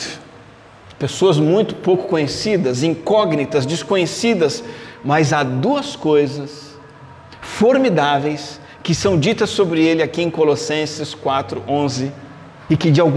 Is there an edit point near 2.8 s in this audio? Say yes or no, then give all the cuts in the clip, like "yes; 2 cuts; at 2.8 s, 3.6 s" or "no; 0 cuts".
no; 1 cut; at 0.9 s